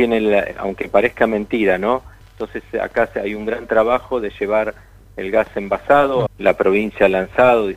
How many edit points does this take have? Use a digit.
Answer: 2